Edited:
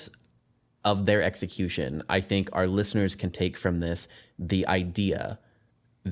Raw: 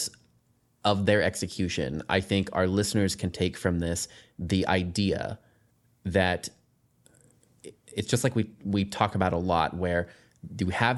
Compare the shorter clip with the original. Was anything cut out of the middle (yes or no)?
no